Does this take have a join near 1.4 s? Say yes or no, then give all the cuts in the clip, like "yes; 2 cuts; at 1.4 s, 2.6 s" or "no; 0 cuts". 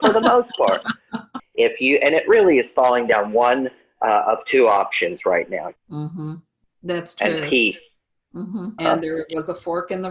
yes; 3 cuts; at 1.4 s, 5.8 s, 8.8 s